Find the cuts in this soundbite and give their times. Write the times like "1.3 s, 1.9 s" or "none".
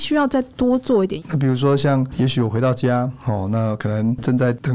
1.2 s